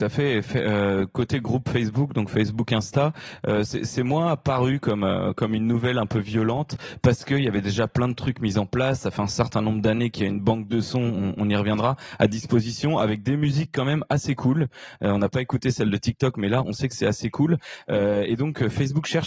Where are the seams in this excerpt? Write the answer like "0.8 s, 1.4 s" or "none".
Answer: none